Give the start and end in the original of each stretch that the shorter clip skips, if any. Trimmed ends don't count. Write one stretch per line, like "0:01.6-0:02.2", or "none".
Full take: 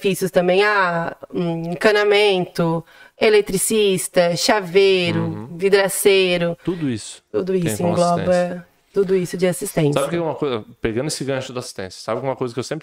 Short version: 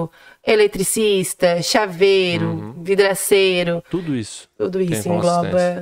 none